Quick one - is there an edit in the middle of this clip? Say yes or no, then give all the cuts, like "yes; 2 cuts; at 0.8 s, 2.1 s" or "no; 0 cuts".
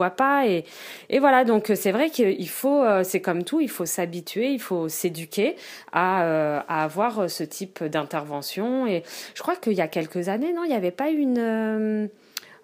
no; 0 cuts